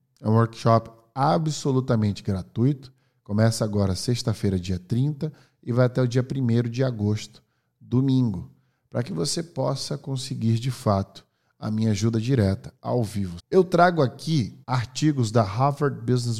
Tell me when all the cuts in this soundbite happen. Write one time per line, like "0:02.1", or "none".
0:13.4
0:14.6